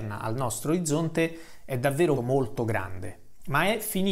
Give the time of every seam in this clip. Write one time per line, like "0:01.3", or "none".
0:02.2